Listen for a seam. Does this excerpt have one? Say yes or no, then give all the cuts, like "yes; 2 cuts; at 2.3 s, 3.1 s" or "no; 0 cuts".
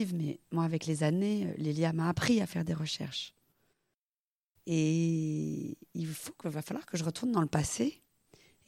yes; 1 cut; at 4.6 s